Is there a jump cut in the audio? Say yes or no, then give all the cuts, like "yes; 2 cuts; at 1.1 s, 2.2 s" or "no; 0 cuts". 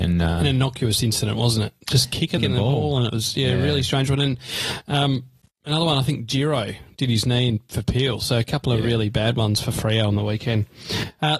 yes; 1 cut; at 2.4 s